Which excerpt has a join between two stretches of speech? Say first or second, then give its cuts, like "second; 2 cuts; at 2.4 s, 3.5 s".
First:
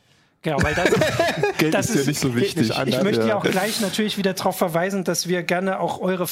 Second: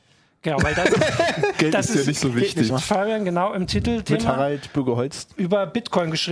second; 1 cut; at 2.7 s